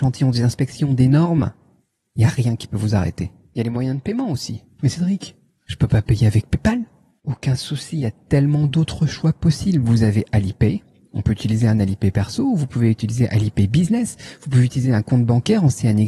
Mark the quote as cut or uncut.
uncut